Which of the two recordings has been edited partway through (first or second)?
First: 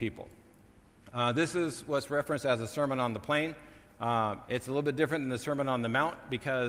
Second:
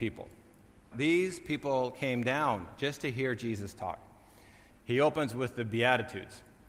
second